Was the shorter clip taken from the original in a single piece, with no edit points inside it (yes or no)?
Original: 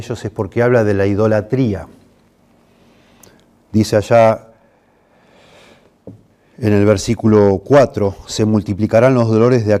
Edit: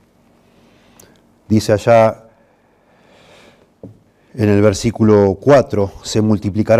yes